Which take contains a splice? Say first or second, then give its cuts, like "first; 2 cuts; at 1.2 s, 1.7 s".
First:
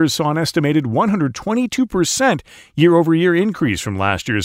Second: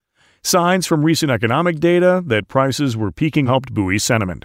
second; 1 cut; at 3.5 s